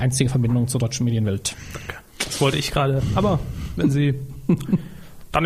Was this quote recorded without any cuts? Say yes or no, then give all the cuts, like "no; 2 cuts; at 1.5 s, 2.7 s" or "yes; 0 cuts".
yes; 0 cuts